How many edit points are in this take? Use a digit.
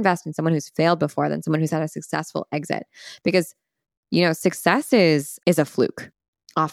1